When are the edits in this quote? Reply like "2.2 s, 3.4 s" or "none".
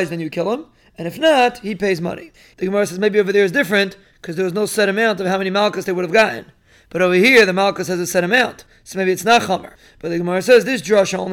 2.5 s